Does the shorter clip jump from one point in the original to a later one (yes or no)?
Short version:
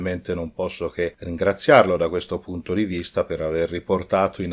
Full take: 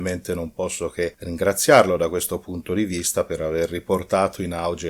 no